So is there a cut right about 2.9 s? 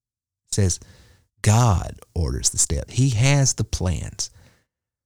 yes; 1 cut; at 2.9 s

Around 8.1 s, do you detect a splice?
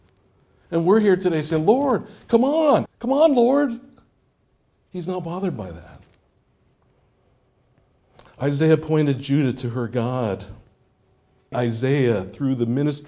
no; 2 cuts; at 2.9 s, 11.5 s

